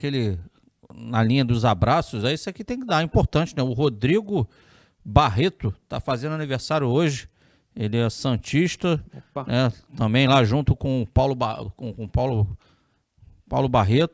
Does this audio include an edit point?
no; 0 cuts

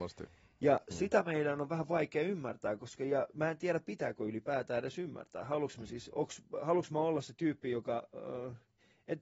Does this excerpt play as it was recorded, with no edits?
yes; 0 cuts

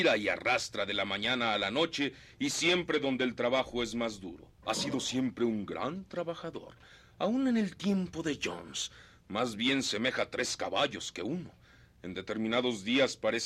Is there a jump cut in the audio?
yes; 1 cut; at 4.6 s

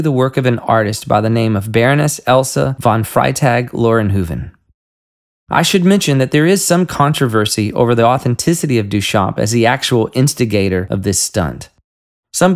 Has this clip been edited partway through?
yes; 1 cut; at 5.3 s

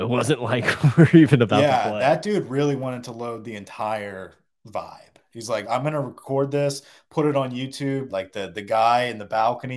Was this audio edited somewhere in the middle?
yes; 2 cuts; at 5.6 s, 8.1 s

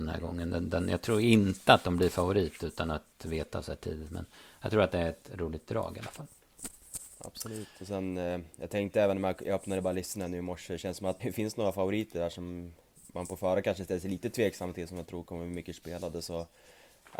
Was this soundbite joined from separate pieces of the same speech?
yes; 1 cut; at 11.2 s

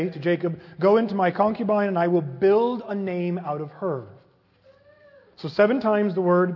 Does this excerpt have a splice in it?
no; 0 cuts

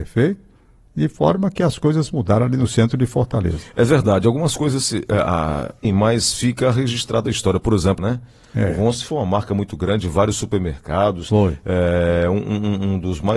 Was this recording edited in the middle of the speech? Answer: yes; 2 cuts; at 5.8 s, 8.0 s

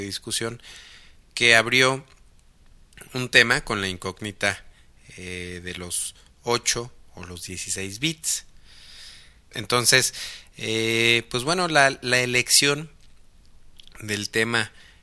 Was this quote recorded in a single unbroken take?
no; 1 cut; at 9.5 s

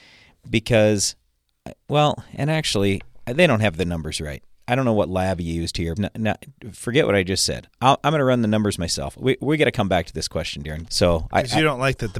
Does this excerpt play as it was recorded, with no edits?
no; 2 cuts; at 6.0 s, 10.9 s

